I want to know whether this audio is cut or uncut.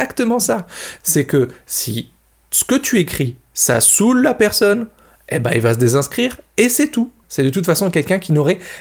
cut